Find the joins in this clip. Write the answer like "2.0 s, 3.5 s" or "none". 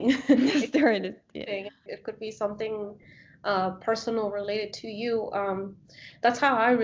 1.9 s